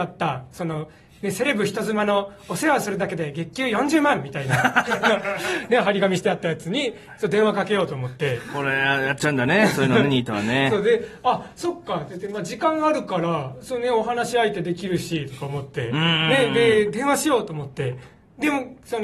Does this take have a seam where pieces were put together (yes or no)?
no